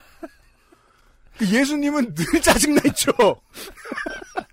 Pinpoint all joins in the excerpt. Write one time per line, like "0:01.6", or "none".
0:03.5